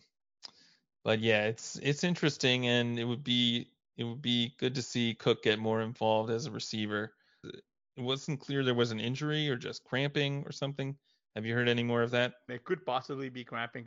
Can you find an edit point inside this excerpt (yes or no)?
yes